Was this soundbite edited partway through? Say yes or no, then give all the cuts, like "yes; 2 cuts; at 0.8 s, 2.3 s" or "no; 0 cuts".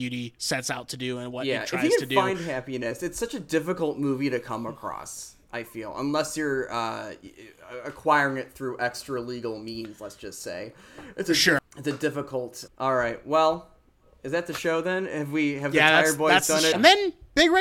yes; 3 cuts; at 11.6 s, 12.7 s, 16.7 s